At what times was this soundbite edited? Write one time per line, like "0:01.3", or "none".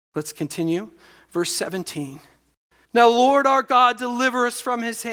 0:02.8